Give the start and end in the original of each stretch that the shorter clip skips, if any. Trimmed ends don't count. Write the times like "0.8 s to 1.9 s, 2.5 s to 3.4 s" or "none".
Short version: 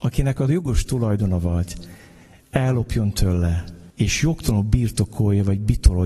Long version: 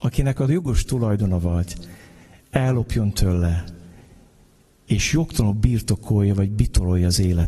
3.9 s to 4.8 s